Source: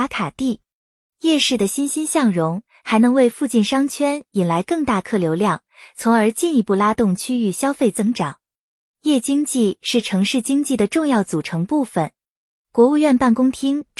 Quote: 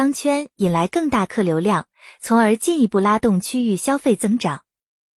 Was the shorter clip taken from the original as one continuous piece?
yes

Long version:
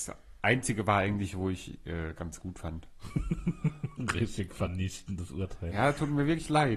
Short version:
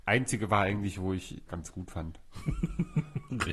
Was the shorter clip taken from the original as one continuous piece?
no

